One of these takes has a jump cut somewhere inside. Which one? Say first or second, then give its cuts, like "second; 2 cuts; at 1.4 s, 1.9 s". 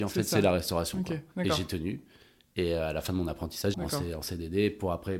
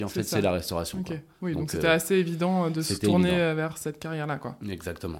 first; 2 cuts; at 1.3 s, 3.7 s